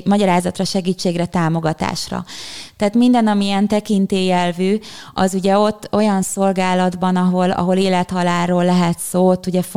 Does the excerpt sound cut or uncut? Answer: cut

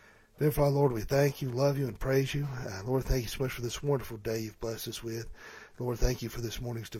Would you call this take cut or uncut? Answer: uncut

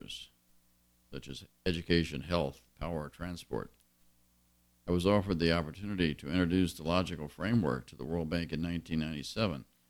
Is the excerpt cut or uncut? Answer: uncut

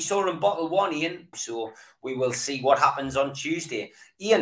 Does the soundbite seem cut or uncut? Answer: cut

